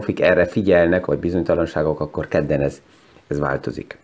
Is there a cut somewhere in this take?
yes; 1 cut; at 1.1 s

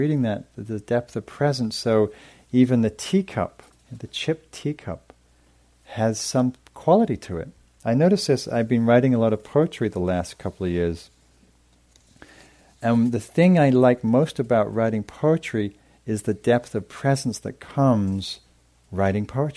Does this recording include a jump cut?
no; 0 cuts

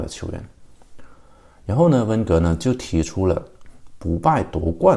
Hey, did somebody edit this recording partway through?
no; 0 cuts

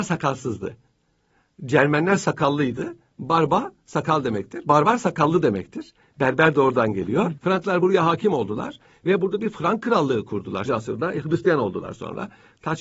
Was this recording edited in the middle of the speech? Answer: yes; 2 cuts; at 7.4 s, 10.7 s

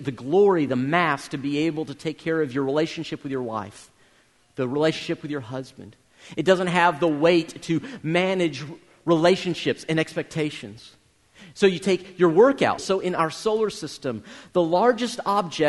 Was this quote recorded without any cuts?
no; 1 cut; at 12.8 s

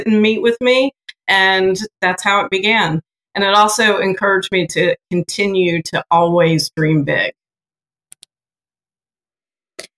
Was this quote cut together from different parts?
yes; 1 cut; at 1.2 s

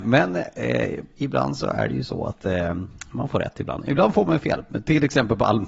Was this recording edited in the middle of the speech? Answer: no; 0 cuts

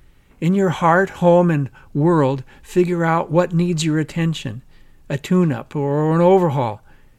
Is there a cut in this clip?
no; 0 cuts

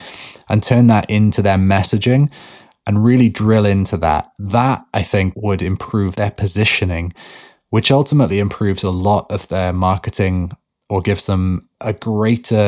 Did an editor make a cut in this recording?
no; 0 cuts

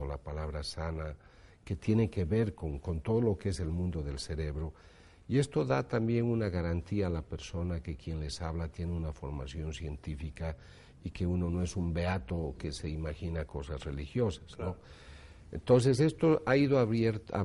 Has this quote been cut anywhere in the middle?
no; 0 cuts

